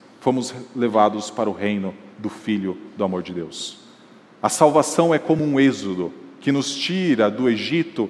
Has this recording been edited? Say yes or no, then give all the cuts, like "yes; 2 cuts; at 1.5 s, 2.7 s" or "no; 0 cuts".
no; 0 cuts